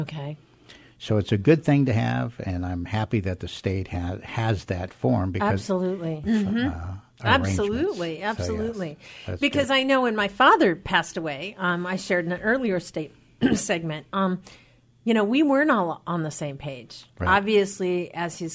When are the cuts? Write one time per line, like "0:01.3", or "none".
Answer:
0:06.2

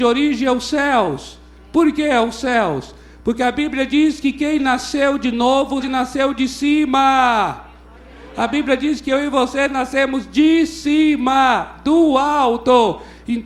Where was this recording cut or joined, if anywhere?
0:05.8

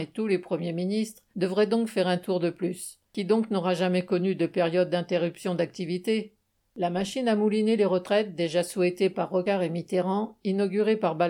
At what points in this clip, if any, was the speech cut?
0:03.1

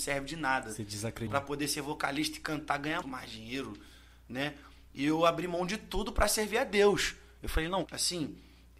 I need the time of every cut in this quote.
0:01.3
0:03.0
0:07.8

